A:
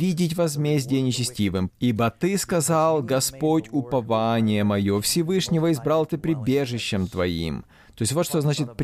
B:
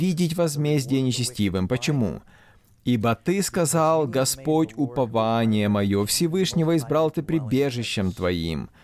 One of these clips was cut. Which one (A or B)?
A